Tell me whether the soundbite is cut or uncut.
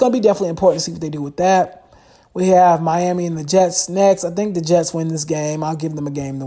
uncut